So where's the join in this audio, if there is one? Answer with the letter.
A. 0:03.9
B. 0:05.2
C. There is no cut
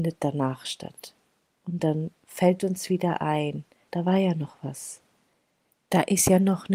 A